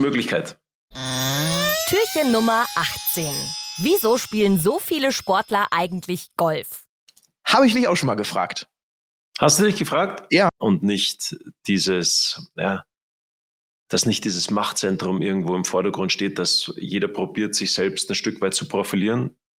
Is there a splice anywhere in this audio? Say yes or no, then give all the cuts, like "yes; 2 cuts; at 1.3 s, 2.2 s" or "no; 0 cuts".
yes; 1 cut; at 10.5 s